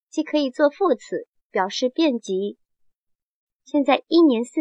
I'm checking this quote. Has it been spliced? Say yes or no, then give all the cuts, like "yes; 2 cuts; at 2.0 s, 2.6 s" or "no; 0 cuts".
yes; 2 cuts; at 1.4 s, 3.5 s